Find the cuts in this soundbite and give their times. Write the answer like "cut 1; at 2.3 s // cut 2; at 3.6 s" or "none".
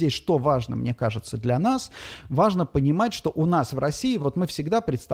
none